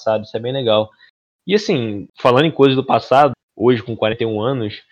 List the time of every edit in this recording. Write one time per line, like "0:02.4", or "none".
0:02.1
0:03.3